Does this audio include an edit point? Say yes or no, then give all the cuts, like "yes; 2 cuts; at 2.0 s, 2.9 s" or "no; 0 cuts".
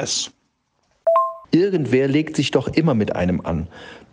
yes; 1 cut; at 1.4 s